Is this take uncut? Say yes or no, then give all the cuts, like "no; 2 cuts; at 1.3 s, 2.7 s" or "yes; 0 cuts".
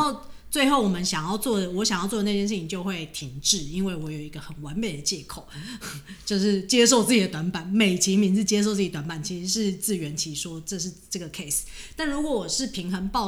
yes; 0 cuts